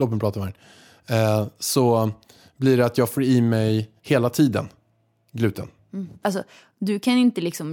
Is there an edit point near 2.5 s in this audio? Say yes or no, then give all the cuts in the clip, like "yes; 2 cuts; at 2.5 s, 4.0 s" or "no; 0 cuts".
no; 2 cuts; at 4.0 s, 6.2 s